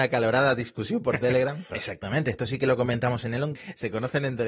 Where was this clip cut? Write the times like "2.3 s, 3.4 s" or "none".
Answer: 1.7 s, 3.5 s